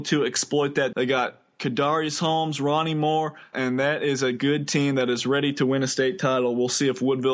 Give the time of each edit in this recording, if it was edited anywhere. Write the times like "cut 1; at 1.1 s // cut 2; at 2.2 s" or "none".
cut 1; at 0.9 s // cut 2; at 3.5 s